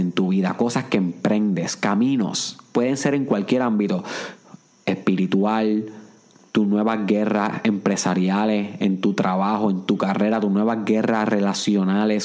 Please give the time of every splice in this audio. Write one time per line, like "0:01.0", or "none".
none